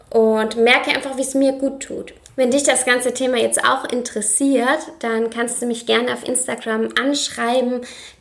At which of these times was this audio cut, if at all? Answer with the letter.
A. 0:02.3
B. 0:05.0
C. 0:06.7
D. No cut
A